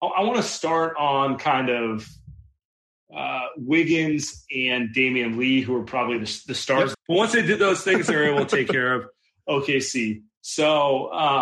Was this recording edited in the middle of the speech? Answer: yes; 1 cut; at 6.9 s

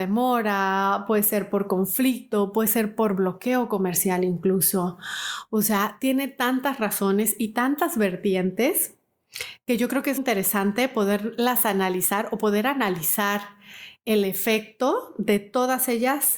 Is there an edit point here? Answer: yes; 1 cut; at 10.2 s

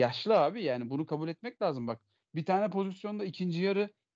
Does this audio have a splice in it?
no; 0 cuts

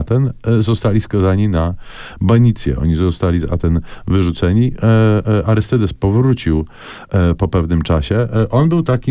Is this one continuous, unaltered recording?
yes; 0 cuts

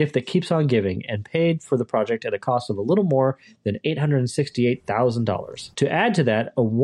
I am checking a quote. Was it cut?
yes; 1 cut; at 5.7 s

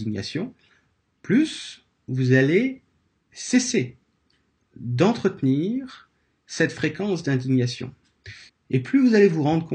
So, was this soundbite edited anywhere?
yes; 1 cut; at 8.5 s

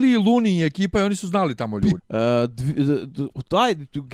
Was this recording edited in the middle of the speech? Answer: yes; 1 cut; at 2.0 s

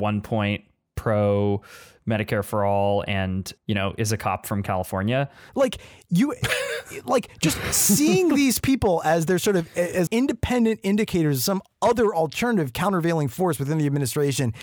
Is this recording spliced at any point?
yes; 2 cuts; at 5.5 s, 10.1 s

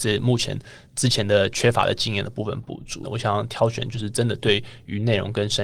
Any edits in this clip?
yes; 1 cut; at 3.0 s

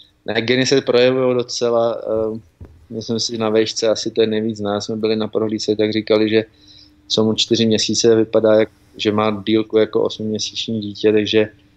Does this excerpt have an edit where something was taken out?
no; 0 cuts

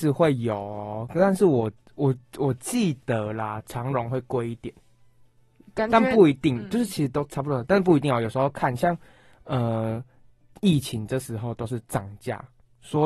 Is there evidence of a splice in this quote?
no; 0 cuts

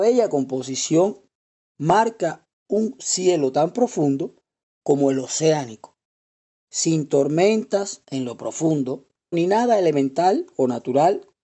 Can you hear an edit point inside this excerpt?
yes; 1 cut; at 9.3 s

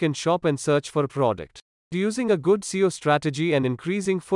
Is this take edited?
yes; 1 cut; at 1.8 s

